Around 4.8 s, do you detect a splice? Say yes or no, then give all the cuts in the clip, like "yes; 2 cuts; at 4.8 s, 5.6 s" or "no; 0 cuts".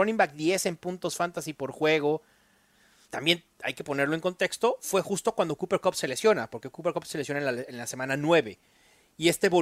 no; 1 cut; at 3.1 s